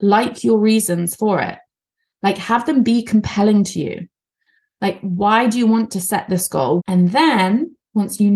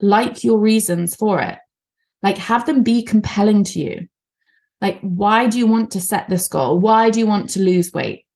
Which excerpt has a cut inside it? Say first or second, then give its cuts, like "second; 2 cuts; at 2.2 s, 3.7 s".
first; 1 cut; at 6.8 s